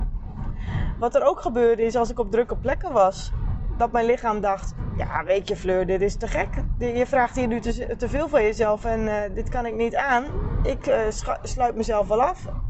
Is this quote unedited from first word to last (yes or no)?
yes